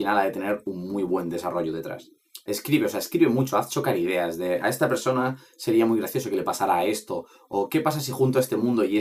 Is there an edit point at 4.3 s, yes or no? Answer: no